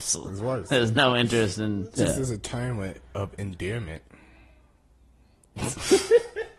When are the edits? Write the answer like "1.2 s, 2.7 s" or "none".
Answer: 2.0 s